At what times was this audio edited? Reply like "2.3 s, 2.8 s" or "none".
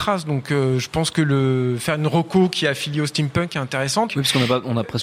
4.1 s